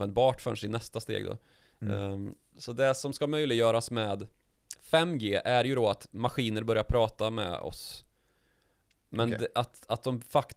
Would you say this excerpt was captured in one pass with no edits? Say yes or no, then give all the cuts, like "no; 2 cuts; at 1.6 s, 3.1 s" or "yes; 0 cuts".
yes; 0 cuts